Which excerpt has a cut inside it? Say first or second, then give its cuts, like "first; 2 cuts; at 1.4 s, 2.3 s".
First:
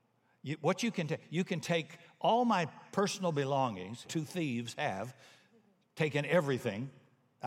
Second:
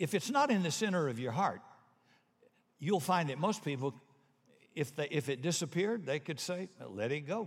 first; 1 cut; at 4.0 s